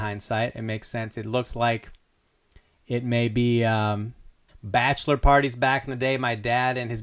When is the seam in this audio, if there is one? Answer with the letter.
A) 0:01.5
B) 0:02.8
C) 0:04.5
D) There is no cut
C